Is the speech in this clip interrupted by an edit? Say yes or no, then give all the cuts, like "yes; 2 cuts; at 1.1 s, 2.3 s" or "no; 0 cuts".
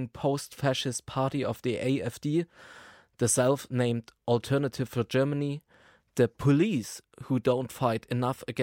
no; 0 cuts